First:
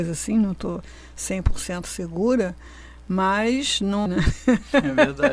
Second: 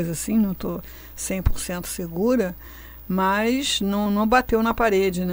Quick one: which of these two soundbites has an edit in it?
first; 1 cut; at 4.1 s

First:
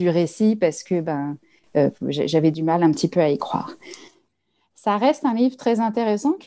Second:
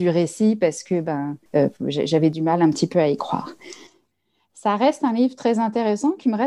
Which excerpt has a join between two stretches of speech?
second; 1 cut; at 1.5 s

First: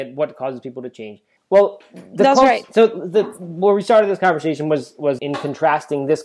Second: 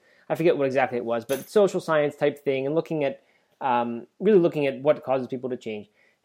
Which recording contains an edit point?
first; 2 cuts; at 1.4 s, 5.2 s

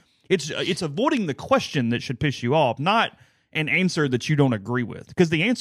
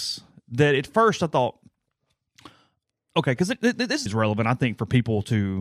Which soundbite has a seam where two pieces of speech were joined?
second; 1 cut; at 4.1 s

